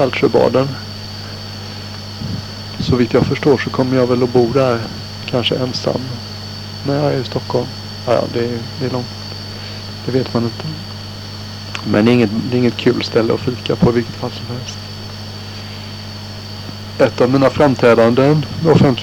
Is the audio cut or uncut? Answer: uncut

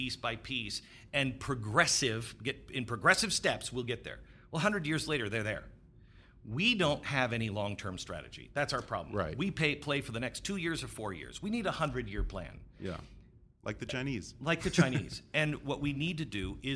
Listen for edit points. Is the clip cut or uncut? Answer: uncut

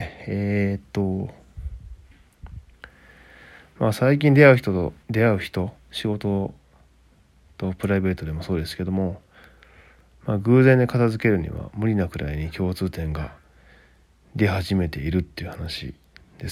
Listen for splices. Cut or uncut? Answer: cut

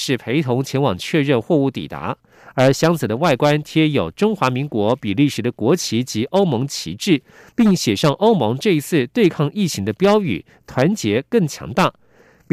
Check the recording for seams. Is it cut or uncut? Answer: uncut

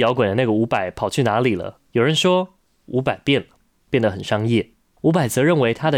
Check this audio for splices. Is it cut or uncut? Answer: uncut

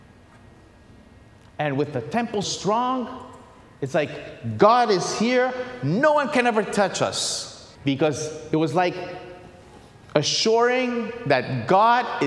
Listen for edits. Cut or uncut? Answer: cut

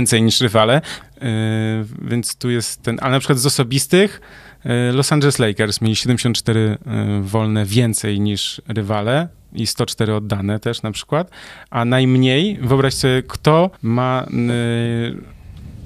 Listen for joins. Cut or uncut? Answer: cut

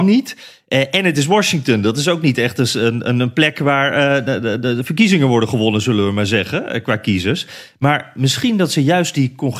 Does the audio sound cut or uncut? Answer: uncut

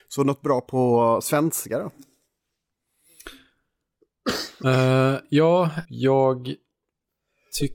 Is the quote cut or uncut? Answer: cut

